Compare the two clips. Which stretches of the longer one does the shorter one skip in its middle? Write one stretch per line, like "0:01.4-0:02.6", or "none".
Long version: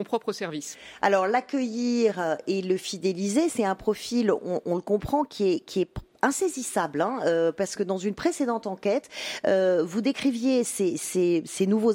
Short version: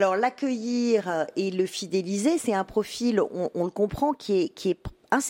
none